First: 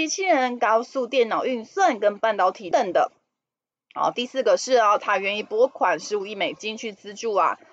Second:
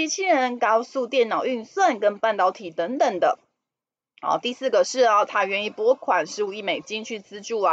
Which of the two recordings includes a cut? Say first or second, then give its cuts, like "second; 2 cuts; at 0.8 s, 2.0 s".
first; 1 cut; at 2.7 s